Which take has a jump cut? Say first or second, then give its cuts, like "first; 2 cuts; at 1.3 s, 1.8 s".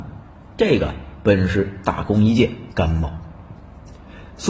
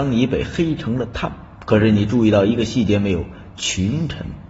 first; 1 cut; at 2.7 s